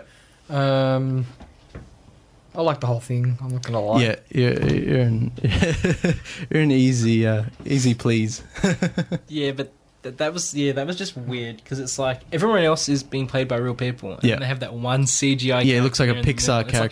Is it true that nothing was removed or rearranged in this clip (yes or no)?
no